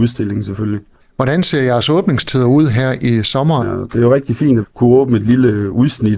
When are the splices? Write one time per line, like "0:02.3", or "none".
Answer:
0:03.6
0:04.6